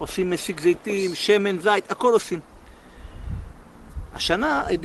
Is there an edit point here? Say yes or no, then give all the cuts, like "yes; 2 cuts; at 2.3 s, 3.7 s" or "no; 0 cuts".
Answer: no; 0 cuts